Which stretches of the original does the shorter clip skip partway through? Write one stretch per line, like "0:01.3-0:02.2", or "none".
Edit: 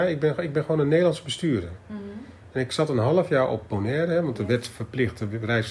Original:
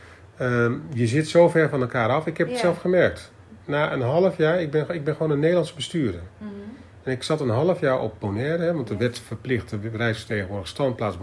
none